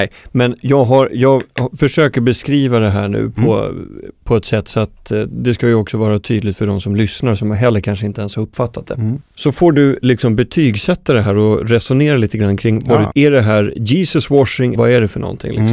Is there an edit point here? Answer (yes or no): yes